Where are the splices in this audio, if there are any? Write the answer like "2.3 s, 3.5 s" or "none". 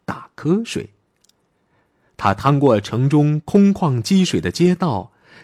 none